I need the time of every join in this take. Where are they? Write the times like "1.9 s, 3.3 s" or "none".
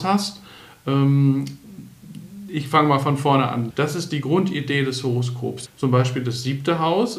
3.7 s, 5.7 s